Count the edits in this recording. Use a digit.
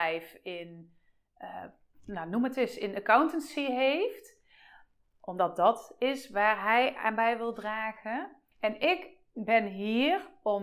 1